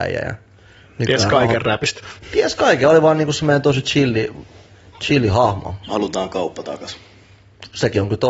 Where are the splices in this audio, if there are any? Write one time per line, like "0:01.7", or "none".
0:05.8